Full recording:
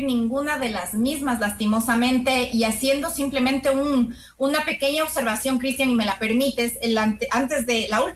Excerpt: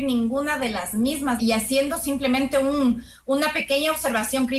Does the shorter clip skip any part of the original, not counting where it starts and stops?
yes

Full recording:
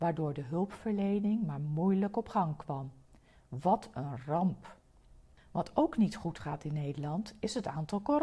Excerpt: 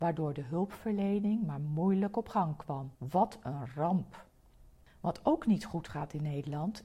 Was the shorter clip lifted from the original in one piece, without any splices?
no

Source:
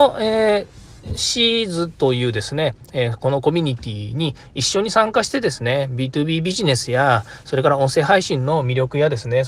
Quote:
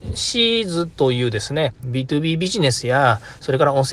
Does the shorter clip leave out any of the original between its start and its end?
yes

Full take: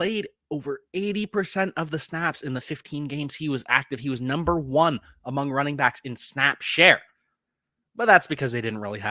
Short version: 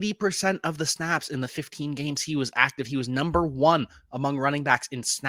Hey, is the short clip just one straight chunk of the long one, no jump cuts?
yes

